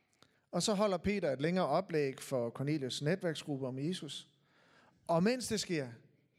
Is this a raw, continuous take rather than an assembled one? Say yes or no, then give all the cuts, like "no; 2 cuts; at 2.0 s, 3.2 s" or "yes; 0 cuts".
yes; 0 cuts